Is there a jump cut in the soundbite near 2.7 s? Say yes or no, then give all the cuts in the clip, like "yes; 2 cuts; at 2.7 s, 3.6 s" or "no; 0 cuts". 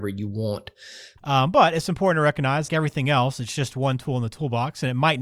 yes; 2 cuts; at 1.2 s, 2.7 s